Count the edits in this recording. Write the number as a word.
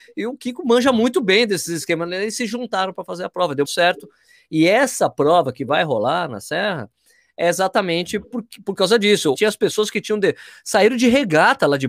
two